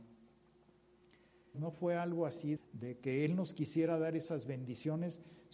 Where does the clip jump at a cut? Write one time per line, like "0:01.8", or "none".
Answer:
0:01.5
0:02.6